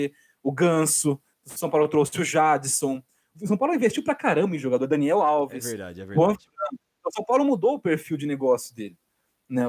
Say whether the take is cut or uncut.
cut